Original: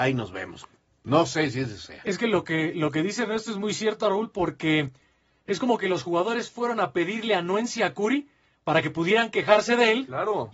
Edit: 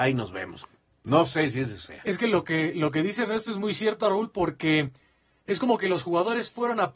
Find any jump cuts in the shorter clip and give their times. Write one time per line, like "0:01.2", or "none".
none